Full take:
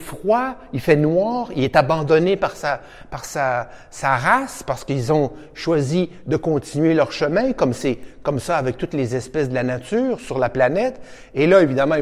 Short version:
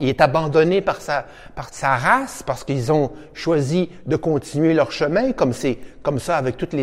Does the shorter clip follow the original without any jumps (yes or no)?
no